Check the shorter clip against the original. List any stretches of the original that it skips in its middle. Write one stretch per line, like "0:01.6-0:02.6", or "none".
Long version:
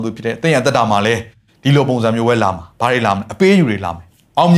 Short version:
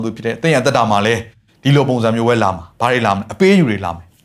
none